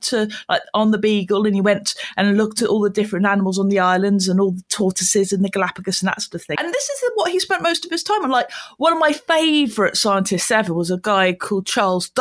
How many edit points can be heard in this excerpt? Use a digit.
1